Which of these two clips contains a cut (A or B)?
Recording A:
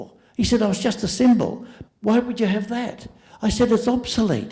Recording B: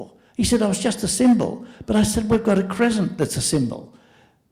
A